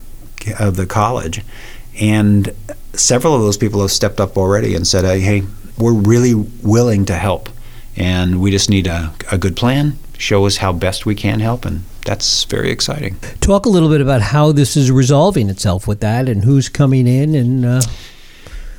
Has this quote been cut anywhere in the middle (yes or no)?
yes